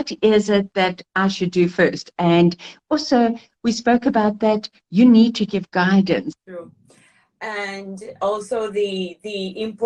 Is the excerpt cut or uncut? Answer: cut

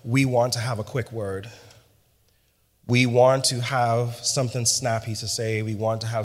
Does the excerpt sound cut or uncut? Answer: uncut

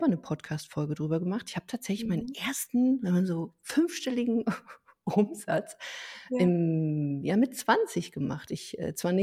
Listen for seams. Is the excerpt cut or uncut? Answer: uncut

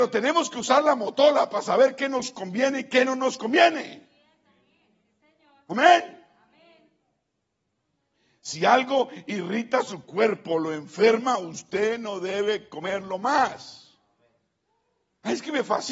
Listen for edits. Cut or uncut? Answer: uncut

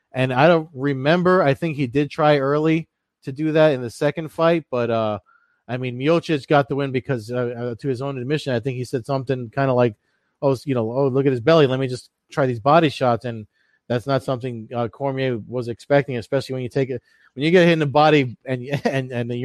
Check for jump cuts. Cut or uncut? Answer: uncut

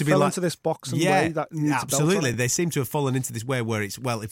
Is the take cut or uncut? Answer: uncut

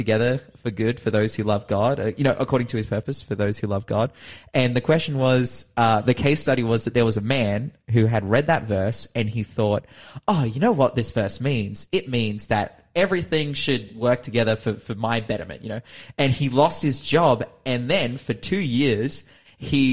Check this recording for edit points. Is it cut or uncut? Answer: uncut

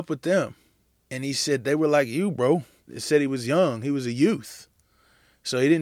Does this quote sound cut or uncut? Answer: cut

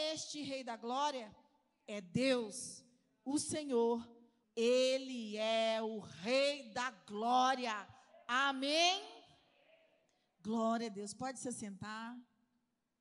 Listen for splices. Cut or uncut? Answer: cut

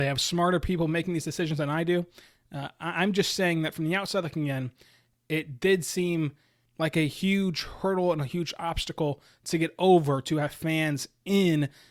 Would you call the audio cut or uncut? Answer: uncut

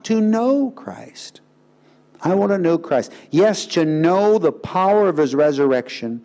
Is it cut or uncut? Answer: uncut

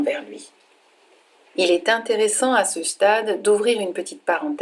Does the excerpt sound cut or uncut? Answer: cut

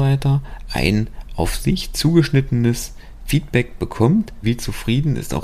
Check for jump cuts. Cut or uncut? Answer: cut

